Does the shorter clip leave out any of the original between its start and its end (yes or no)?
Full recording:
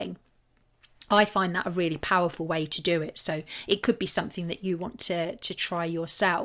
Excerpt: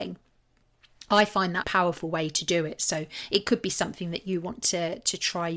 yes